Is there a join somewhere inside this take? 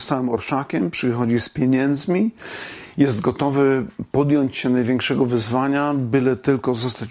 no; 0 cuts

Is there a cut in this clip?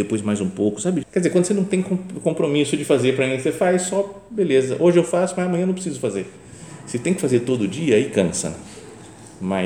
yes; 1 cut; at 1.0 s

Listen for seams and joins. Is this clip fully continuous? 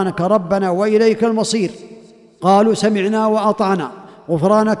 yes; 0 cuts

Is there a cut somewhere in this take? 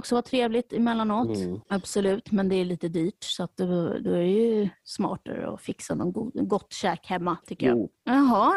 no; 0 cuts

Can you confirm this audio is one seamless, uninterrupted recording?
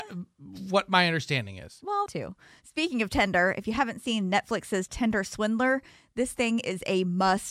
no; 1 cut; at 2.1 s

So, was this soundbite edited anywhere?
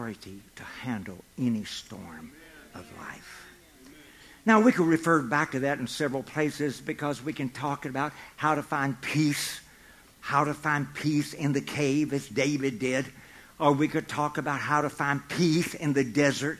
no; 0 cuts

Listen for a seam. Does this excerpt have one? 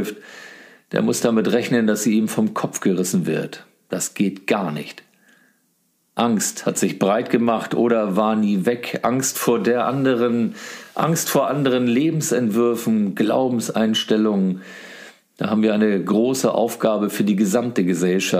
no; 0 cuts

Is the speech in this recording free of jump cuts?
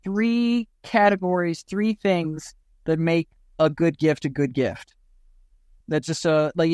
no; 1 cut; at 5.8 s

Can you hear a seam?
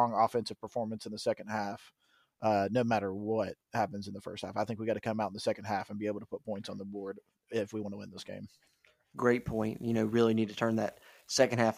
no; 0 cuts

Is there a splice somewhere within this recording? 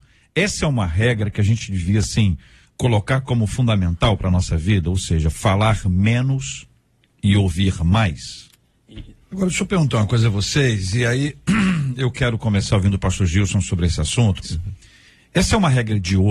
yes; 2 cuts; at 9.2 s, 14.4 s

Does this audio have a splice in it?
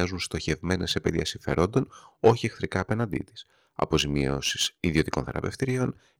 no; 0 cuts

